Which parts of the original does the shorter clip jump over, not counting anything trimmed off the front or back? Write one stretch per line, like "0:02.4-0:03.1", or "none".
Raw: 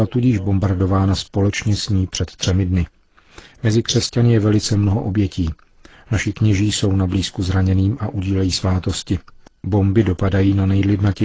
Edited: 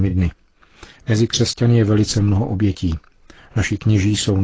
none